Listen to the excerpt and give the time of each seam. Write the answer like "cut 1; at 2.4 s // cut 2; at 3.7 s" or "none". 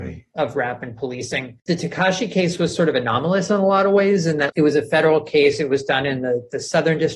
cut 1; at 4.5 s